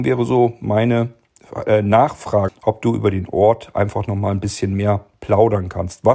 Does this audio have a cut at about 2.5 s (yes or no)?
yes